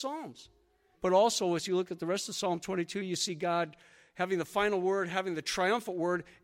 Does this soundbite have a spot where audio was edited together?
yes; 1 cut; at 0.9 s

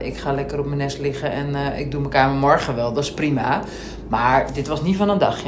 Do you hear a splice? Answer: no; 0 cuts

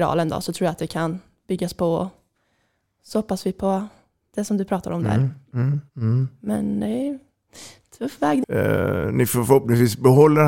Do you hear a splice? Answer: yes; 2 cuts; at 5.9 s, 8.4 s

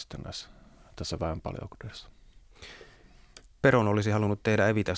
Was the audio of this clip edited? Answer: no; 0 cuts

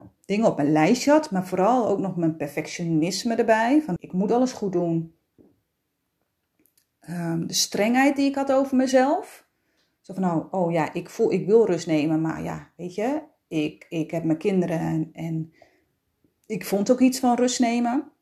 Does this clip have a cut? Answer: yes; 1 cut; at 4.0 s

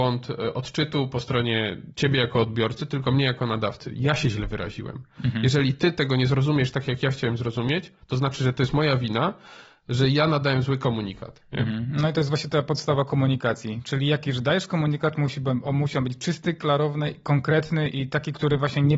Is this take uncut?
yes; 0 cuts

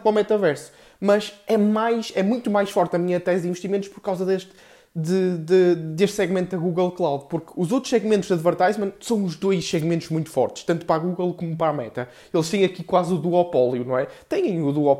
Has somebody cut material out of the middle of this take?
no; 0 cuts

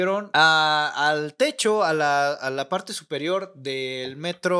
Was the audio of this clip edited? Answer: no; 0 cuts

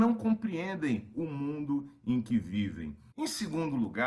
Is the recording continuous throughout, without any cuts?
no; 1 cut; at 3.1 s

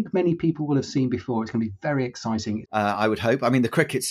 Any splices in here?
yes; 1 cut; at 2.6 s

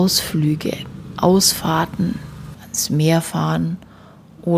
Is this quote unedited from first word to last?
no; 1 cut; at 2.5 s

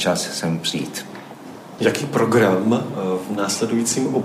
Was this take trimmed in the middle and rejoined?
yes; 1 cut; at 1.8 s

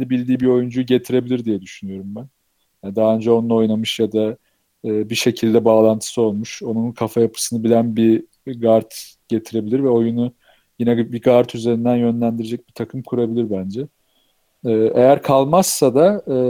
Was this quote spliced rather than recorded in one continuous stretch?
no; 0 cuts

